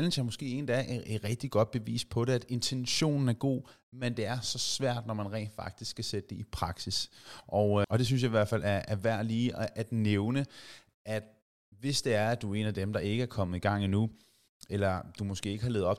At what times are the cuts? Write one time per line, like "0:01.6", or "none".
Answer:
0:07.8